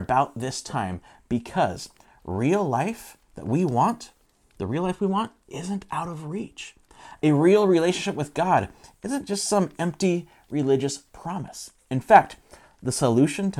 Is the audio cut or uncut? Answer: uncut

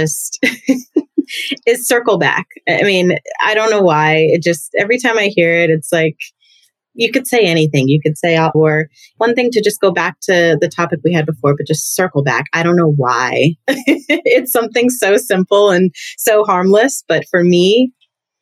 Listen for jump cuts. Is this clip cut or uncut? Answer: cut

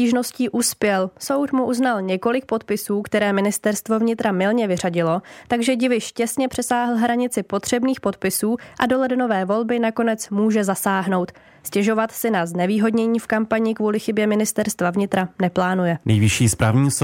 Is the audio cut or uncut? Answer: cut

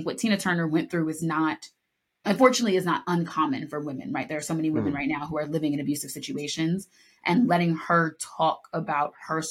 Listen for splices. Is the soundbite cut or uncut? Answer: uncut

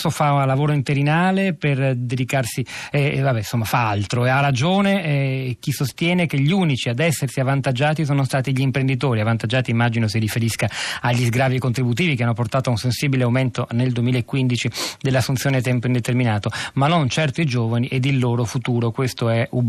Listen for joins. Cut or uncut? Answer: uncut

